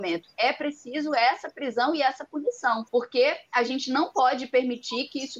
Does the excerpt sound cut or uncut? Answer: cut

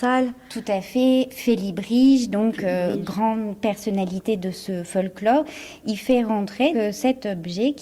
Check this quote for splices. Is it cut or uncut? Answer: cut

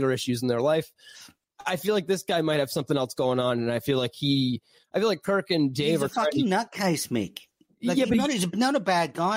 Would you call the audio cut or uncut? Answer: uncut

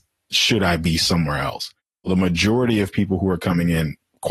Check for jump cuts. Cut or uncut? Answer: uncut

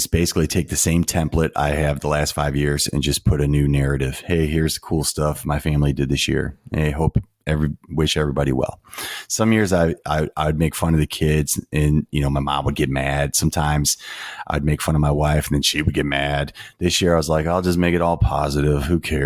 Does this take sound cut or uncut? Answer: uncut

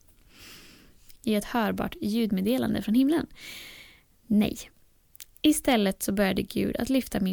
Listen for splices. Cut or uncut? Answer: cut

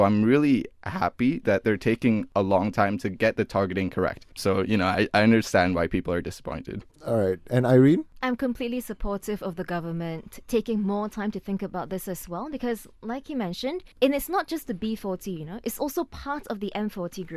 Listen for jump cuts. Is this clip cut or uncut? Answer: cut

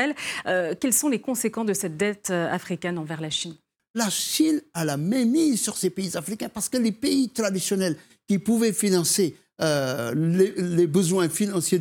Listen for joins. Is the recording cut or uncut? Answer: uncut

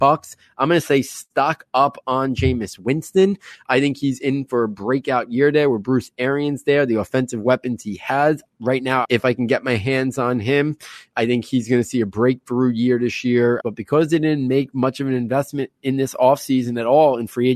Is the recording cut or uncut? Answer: cut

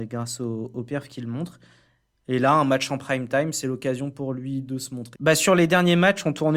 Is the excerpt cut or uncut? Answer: cut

